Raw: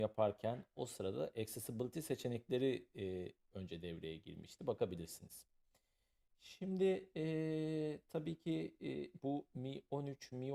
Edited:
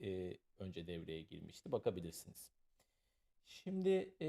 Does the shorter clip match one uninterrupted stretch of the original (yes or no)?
yes